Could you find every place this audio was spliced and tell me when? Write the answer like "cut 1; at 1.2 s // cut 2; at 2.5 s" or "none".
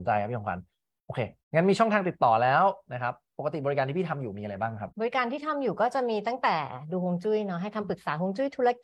cut 1; at 1.4 s // cut 2; at 4.9 s